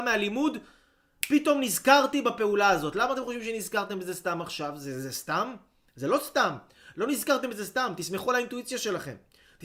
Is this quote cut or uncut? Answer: uncut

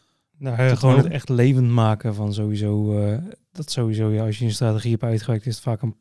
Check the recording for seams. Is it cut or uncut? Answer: cut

